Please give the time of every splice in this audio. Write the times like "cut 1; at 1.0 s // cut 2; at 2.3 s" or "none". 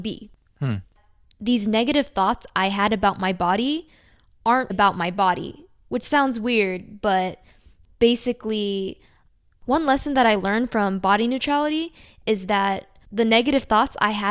cut 1; at 4.7 s